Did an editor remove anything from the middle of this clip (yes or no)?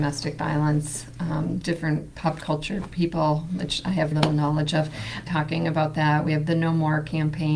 yes